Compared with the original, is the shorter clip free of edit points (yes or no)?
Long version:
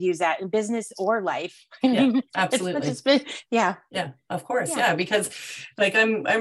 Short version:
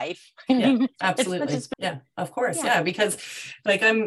no